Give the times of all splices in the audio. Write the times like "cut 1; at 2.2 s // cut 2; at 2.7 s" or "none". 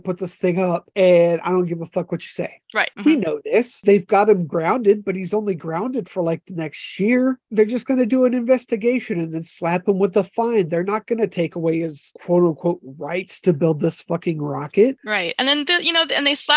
cut 1; at 2.9 s